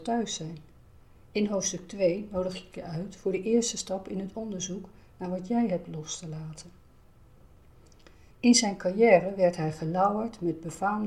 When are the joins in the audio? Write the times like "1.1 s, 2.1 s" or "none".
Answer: 8.3 s